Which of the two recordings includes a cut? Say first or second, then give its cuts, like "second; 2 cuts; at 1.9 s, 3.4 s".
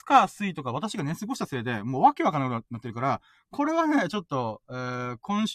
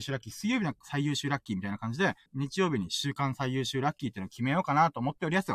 second; 1 cut; at 2.3 s